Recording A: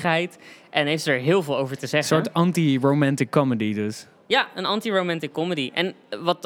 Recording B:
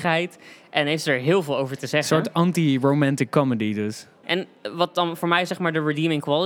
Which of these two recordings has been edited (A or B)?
B